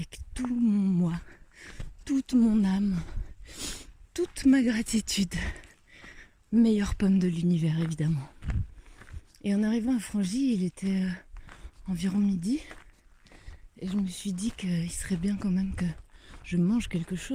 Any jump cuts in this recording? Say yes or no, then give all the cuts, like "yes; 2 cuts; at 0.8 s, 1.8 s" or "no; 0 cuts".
no; 0 cuts